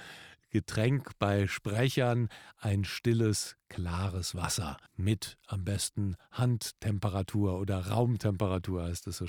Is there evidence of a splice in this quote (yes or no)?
yes